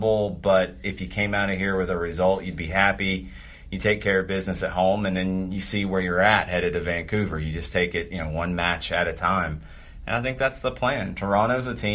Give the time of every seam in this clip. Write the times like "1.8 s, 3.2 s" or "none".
none